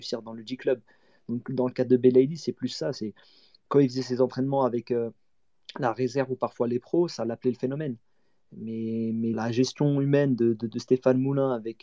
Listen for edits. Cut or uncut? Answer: cut